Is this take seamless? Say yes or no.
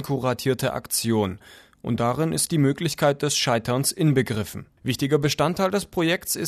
no